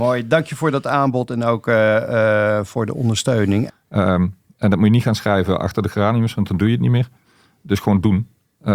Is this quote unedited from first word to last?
no; 1 cut; at 3.7 s

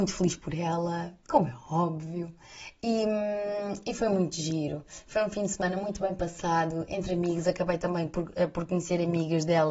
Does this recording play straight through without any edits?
no; 1 cut; at 1.2 s

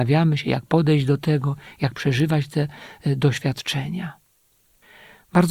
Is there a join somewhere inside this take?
no; 0 cuts

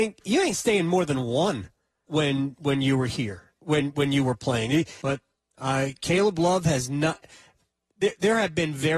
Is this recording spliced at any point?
yes; 2 cuts; at 2.1 s, 5.0 s

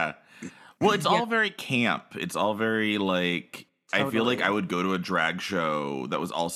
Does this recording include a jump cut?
no; 0 cuts

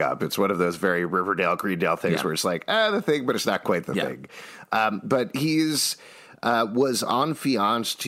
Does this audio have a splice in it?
no; 0 cuts

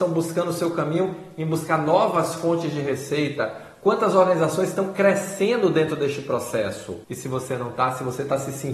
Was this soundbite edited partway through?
no; 0 cuts

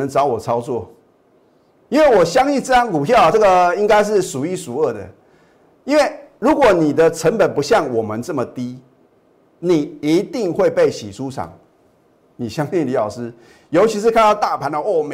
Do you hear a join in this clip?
yes; 1 cut; at 3.3 s

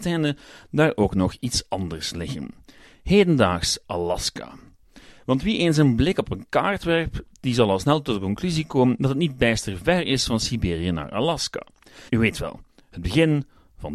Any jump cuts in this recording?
yes; 1 cut; at 12.1 s

